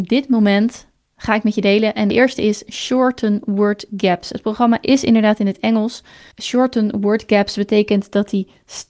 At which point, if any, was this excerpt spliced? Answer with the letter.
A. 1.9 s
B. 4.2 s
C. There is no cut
C